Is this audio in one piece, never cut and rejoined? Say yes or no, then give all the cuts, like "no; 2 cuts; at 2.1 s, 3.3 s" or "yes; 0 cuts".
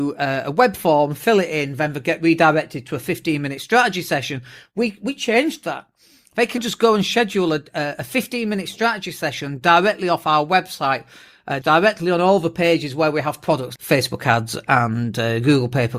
no; 3 cuts; at 6.6 s, 11.6 s, 13.8 s